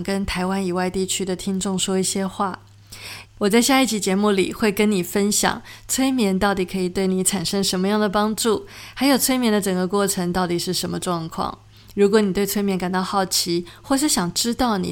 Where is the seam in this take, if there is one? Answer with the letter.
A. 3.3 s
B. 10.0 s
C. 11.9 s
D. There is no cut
A